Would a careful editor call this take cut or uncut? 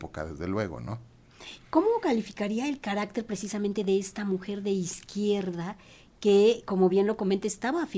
uncut